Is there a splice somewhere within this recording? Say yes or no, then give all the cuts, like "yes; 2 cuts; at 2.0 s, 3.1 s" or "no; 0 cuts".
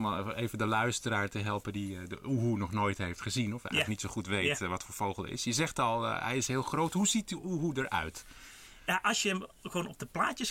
no; 0 cuts